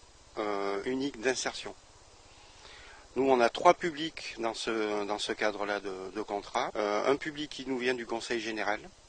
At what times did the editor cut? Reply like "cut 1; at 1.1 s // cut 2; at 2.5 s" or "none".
cut 1; at 6.7 s